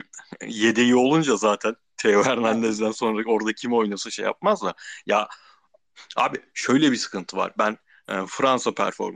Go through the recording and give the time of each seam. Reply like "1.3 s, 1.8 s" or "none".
none

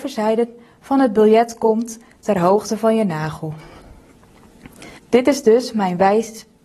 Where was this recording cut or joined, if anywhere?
5.0 s

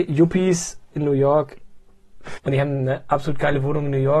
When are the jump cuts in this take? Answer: 0.9 s, 2.4 s

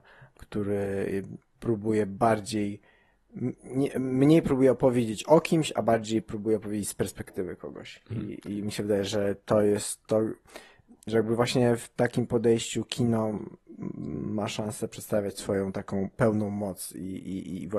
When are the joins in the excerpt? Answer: none

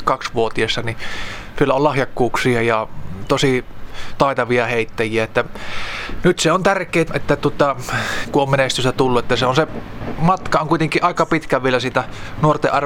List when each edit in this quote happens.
7.1 s, 8.2 s

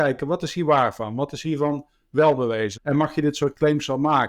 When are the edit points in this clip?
2.8 s

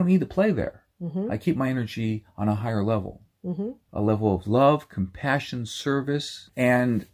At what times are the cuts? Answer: none

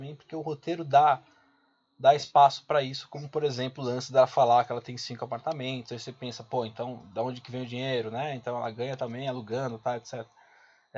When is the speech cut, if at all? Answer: none

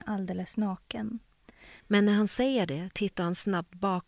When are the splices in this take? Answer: 1.8 s

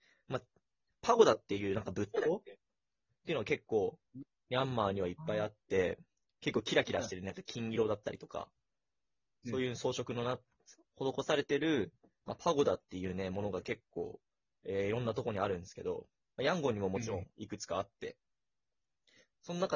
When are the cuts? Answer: none

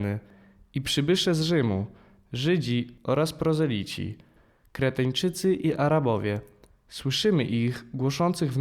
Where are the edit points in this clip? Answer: none

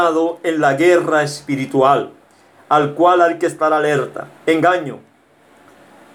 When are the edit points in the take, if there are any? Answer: none

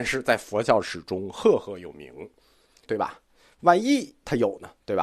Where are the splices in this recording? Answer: 2.9 s

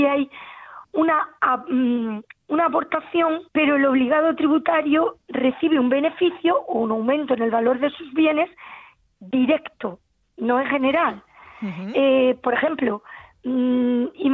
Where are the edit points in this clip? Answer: 3.5 s

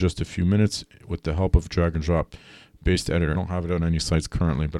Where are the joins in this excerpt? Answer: 3.3 s

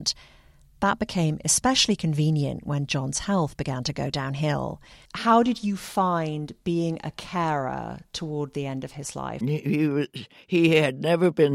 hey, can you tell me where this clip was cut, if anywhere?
5.1 s, 9.4 s

